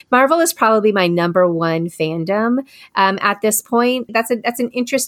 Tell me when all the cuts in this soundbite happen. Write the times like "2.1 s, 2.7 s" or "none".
4.1 s

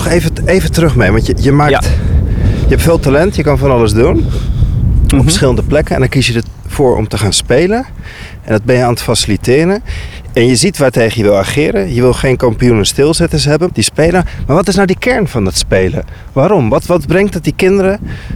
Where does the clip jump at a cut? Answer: 13.7 s

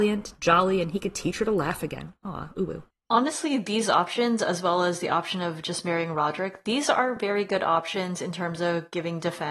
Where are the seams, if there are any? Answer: none

